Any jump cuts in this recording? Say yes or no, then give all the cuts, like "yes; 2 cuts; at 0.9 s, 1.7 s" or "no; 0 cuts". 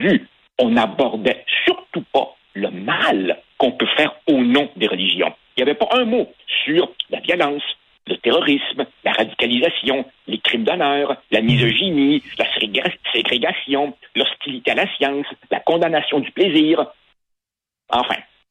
yes; 1 cut; at 11.3 s